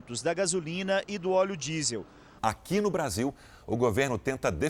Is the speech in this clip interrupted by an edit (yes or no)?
yes